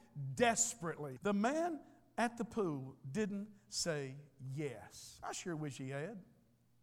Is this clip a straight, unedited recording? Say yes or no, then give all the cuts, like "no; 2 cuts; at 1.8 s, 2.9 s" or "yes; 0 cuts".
no; 1 cut; at 1.2 s